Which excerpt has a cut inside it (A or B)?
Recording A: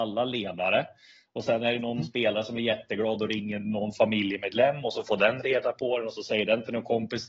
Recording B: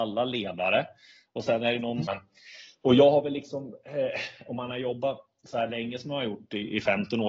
B